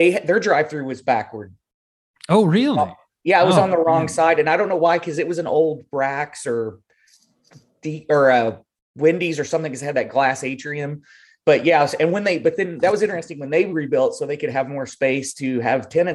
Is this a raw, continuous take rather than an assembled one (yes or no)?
yes